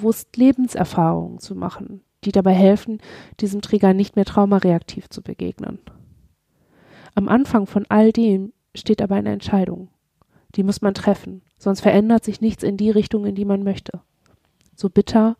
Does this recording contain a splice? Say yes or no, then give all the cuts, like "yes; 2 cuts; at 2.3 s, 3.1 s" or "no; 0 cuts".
no; 0 cuts